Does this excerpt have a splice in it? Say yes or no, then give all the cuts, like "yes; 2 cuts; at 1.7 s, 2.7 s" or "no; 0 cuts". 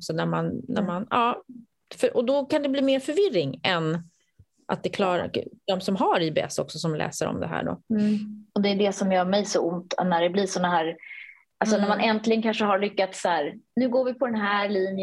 no; 0 cuts